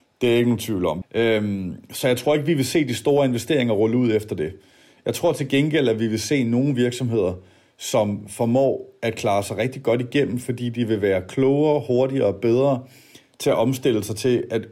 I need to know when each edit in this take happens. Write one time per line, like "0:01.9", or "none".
0:01.0